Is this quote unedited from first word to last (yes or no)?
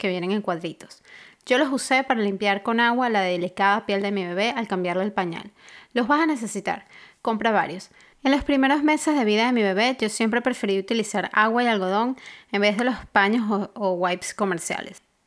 no